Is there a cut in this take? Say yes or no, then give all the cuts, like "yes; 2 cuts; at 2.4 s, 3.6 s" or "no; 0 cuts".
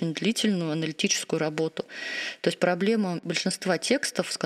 no; 0 cuts